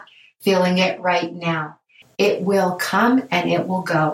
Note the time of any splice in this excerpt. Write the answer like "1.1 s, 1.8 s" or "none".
2.0 s